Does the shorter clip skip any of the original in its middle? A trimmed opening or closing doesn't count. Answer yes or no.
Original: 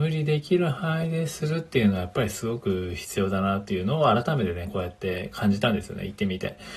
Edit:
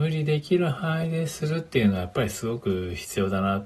no